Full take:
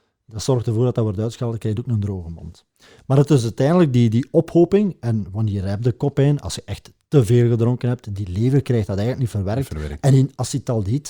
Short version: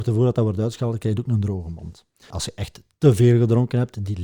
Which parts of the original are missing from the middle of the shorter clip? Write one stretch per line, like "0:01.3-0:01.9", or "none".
0:02.9-0:06.4